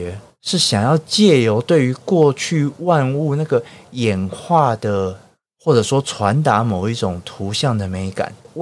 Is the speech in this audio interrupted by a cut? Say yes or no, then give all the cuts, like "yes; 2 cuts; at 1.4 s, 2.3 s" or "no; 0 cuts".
yes; 1 cut; at 5.5 s